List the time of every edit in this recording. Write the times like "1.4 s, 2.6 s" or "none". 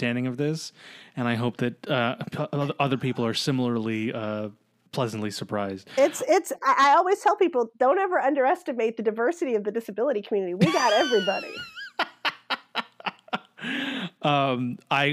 none